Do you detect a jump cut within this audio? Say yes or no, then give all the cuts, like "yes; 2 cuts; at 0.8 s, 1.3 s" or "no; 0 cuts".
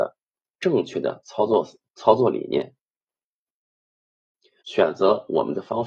yes; 1 cut; at 4.6 s